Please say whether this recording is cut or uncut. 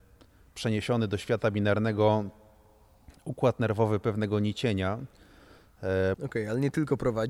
cut